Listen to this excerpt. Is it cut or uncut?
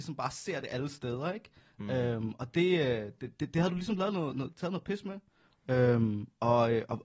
uncut